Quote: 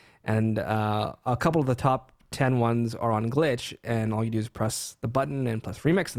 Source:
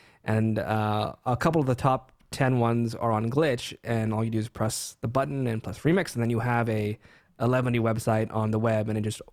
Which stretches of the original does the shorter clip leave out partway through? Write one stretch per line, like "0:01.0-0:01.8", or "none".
none